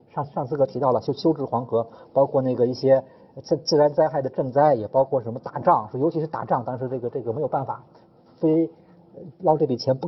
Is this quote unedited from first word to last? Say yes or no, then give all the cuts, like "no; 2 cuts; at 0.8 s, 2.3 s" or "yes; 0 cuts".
yes; 0 cuts